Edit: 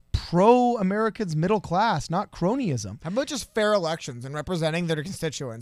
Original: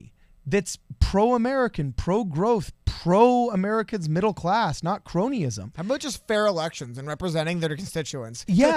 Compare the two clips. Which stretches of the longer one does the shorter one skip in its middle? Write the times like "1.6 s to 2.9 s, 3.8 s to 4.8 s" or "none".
none